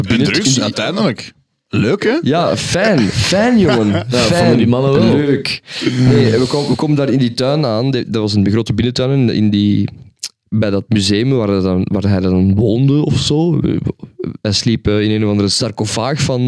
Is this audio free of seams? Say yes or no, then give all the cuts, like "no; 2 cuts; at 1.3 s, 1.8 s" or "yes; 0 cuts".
yes; 0 cuts